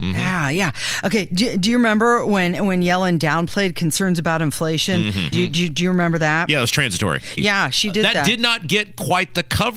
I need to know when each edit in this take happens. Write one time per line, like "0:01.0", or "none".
0:05.3
0:07.4